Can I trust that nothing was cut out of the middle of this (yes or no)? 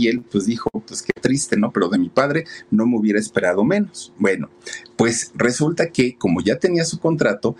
yes